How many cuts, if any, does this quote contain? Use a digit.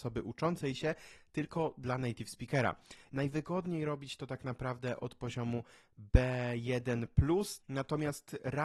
2